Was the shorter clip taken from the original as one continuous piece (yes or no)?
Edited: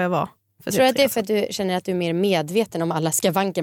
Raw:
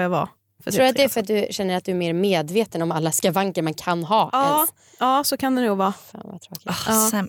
yes